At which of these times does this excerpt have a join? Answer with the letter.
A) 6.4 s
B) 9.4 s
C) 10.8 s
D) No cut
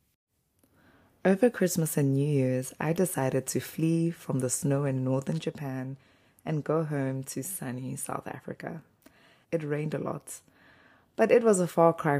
B